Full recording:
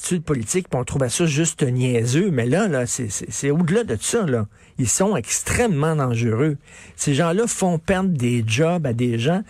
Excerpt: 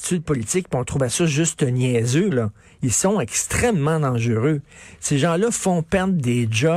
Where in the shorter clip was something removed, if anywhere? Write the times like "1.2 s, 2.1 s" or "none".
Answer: 2.3 s